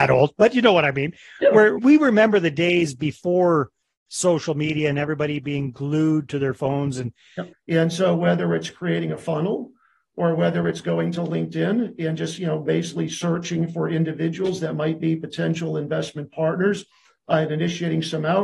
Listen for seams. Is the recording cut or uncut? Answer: cut